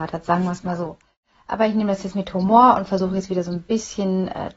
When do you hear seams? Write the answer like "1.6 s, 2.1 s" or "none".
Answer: none